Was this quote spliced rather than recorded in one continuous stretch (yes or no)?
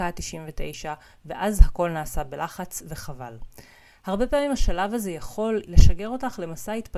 yes